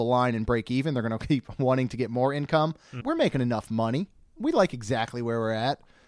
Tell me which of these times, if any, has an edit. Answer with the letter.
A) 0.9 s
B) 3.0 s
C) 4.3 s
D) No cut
B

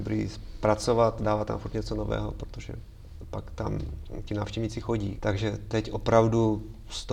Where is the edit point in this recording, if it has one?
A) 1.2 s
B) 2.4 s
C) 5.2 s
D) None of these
C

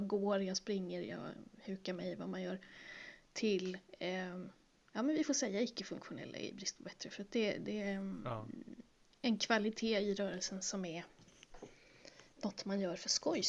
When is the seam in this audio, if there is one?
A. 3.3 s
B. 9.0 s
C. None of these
C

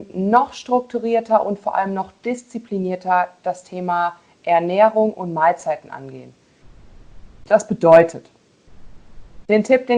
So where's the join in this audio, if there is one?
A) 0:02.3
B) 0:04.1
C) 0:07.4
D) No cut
C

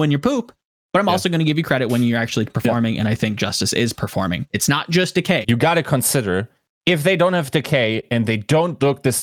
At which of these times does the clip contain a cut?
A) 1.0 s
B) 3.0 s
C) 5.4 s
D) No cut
C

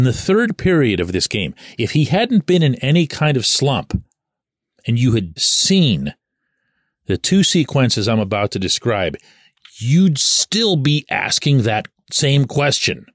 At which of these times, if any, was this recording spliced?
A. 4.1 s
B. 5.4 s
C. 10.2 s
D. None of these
B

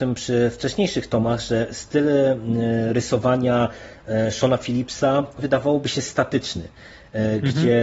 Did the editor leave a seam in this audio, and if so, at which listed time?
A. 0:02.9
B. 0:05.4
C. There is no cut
B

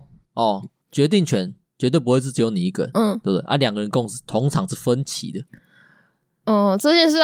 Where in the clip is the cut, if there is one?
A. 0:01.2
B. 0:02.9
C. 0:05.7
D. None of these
B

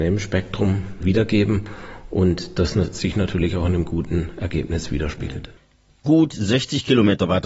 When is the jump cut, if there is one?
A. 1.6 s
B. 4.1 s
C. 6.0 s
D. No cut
D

